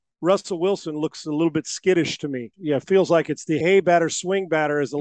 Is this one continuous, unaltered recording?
no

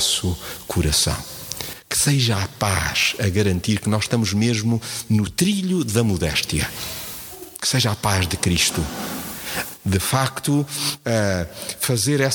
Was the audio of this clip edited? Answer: no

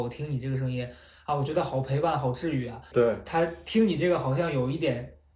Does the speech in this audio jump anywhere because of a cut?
yes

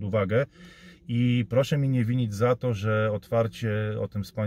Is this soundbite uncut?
yes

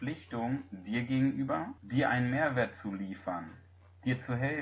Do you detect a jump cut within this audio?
yes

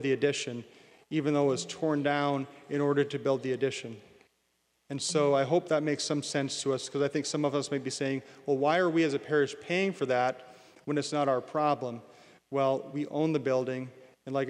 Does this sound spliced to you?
no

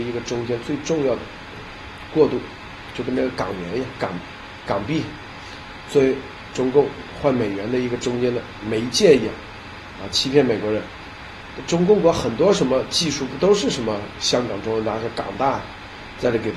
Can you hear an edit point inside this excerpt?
no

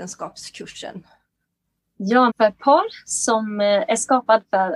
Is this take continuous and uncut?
no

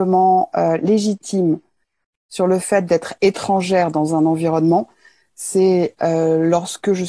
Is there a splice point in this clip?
no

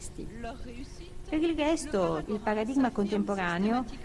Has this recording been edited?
yes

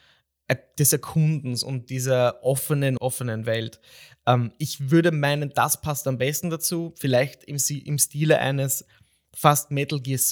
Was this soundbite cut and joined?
yes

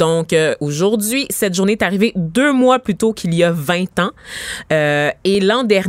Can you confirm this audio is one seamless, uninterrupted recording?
yes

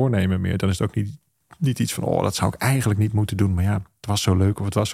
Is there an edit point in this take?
no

